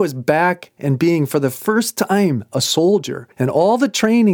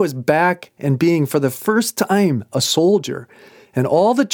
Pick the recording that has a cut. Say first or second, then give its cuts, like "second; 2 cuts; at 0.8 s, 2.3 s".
first; 1 cut; at 3.3 s